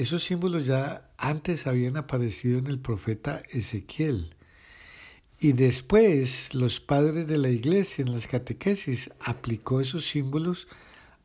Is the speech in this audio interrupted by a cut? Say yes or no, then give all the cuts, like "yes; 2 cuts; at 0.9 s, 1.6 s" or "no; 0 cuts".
no; 0 cuts